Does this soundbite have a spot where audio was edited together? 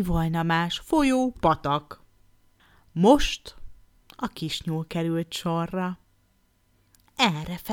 no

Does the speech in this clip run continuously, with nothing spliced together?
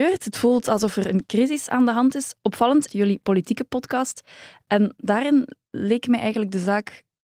no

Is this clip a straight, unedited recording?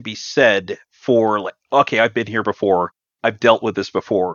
yes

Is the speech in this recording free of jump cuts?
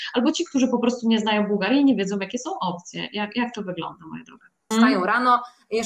no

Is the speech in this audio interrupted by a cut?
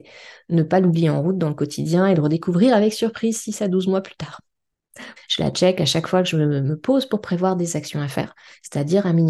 yes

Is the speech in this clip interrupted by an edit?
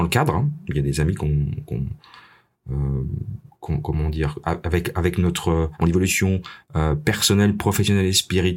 yes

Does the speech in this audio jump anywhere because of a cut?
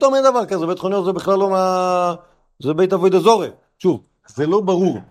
no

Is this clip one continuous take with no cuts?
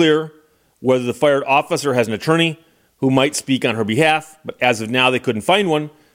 yes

